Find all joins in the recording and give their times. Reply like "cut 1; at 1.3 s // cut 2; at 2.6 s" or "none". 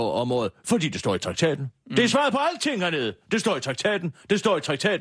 none